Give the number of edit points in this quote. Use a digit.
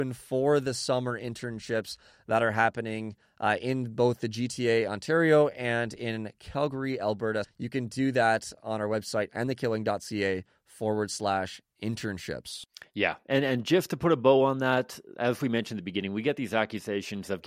2